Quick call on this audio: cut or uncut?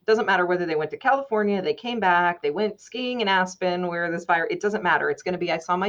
uncut